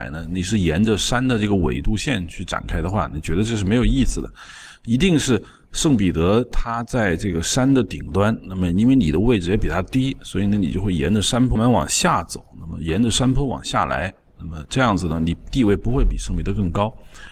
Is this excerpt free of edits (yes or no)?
no